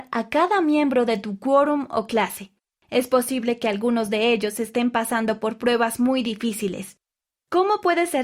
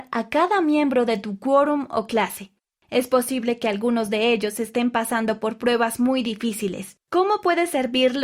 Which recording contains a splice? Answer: second; 1 cut; at 7.0 s

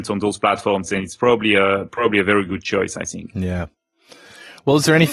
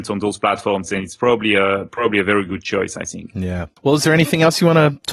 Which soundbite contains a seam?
second; 1 cut; at 3.8 s

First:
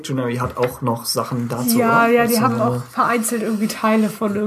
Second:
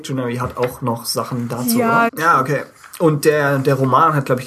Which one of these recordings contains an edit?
second; 1 cut; at 2.1 s

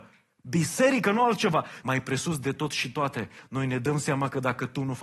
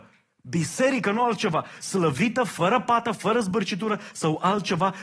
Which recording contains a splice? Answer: first; 1 cut; at 1.8 s

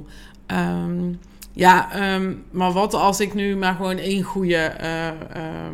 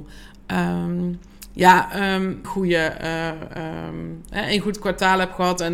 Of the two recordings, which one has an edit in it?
second; 1 cut; at 2.4 s

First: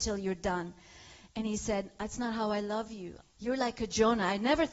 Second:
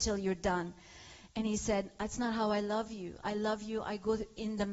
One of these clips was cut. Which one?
first; 1 cut; at 3.2 s

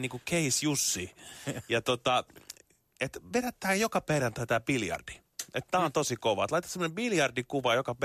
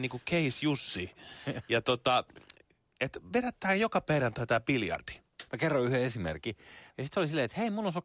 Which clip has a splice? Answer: second; 2 cuts; at 5.5 s, 6.9 s

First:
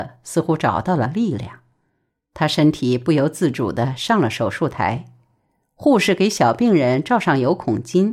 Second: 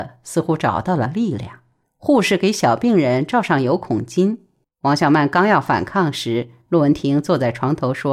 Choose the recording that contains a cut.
second; 2 cuts; at 1.8 s, 4.6 s

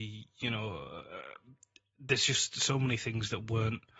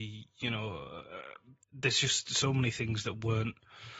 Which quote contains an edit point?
second; 1 cut; at 1.6 s

